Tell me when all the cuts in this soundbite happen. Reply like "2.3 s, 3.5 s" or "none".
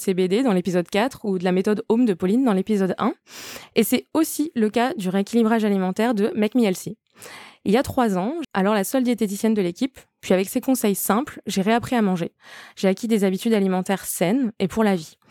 8.4 s